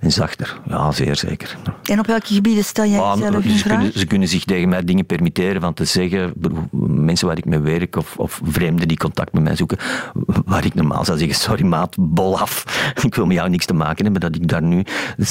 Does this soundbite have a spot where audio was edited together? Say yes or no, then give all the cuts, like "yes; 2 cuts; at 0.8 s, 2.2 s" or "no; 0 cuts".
no; 0 cuts